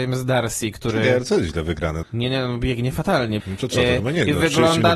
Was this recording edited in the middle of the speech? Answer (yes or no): yes